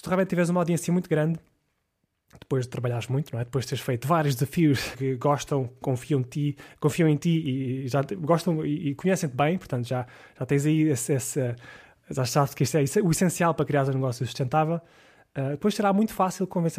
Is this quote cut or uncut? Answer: cut